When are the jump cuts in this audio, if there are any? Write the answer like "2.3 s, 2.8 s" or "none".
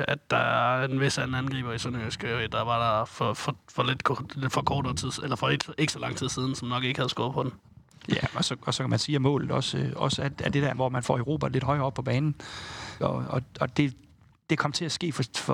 13.0 s